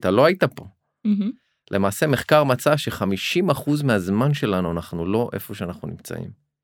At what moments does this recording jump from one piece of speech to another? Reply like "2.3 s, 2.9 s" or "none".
none

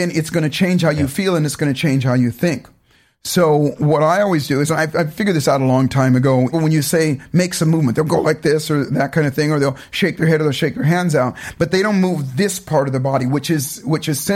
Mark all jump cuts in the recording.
6.5 s

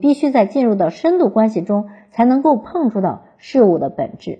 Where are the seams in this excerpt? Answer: none

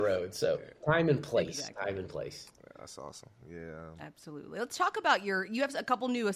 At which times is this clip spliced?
3.4 s

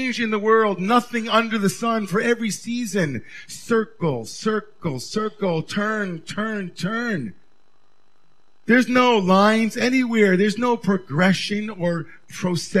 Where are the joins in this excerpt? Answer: none

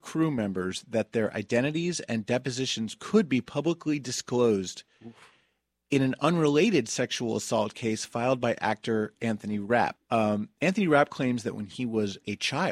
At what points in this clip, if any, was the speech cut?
10.0 s

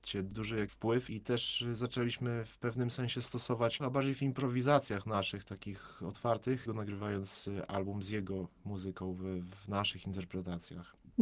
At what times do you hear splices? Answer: 1.1 s, 3.8 s, 6.7 s

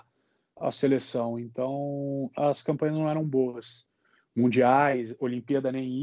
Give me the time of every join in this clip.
2.3 s

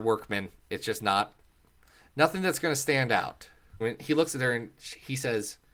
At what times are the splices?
3.8 s

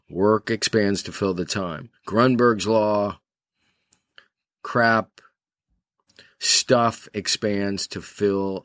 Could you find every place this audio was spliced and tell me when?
none

